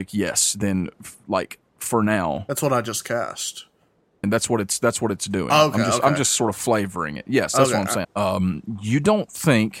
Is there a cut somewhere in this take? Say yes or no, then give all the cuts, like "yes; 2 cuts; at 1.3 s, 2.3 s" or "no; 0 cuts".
yes; 2 cuts; at 4.2 s, 8.0 s